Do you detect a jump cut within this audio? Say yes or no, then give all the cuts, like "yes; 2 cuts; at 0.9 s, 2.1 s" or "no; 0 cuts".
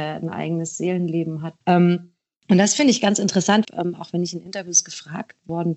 yes; 2 cuts; at 1.6 s, 3.6 s